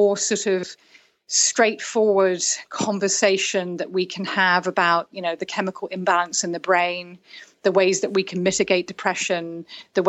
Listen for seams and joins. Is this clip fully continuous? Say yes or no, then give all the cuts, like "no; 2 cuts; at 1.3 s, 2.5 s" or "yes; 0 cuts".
yes; 0 cuts